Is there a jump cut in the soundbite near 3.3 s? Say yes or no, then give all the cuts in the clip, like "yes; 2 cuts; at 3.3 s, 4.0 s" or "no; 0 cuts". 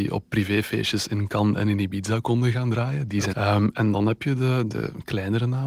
yes; 1 cut; at 3.3 s